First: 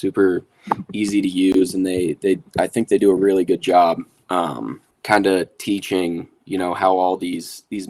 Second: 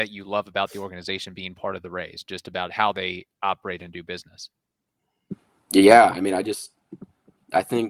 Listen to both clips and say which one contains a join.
first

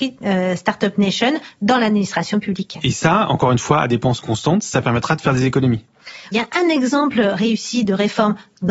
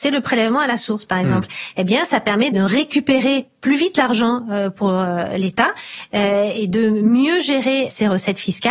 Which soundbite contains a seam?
first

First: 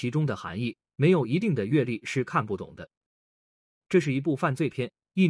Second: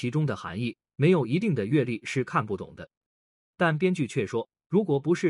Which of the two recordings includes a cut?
second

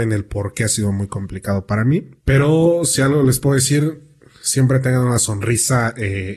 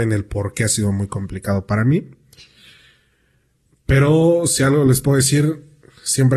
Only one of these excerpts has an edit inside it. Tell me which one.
first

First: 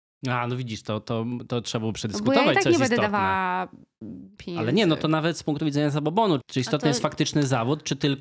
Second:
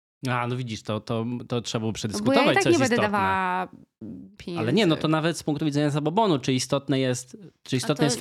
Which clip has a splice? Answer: first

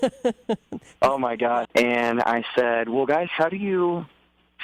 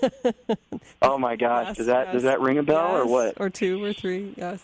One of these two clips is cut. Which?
first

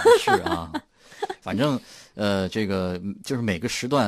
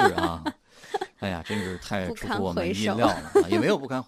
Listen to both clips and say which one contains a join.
first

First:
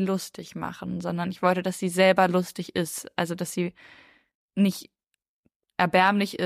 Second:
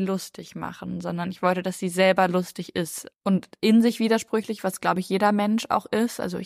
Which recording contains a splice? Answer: second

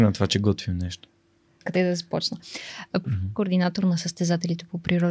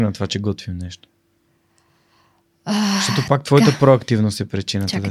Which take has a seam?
first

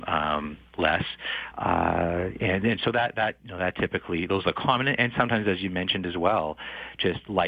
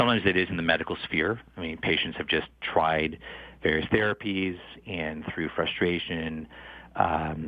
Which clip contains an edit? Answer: first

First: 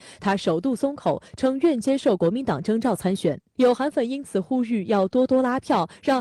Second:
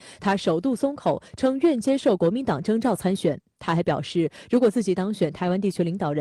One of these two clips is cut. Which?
first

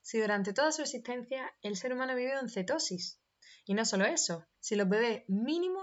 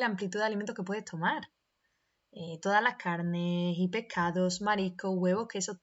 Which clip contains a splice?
first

